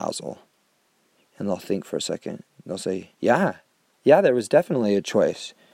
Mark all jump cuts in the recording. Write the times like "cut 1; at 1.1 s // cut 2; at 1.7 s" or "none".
cut 1; at 3.1 s